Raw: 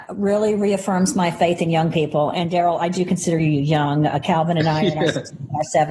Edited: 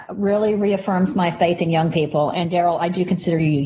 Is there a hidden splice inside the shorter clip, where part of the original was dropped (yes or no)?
no